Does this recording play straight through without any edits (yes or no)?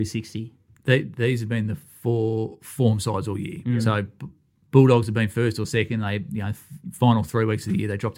yes